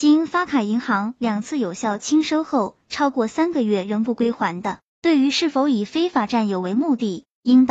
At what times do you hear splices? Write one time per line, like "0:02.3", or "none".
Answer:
0:04.9